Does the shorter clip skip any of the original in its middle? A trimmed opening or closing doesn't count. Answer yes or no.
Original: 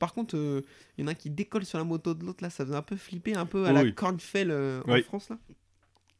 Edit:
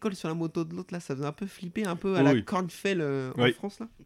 no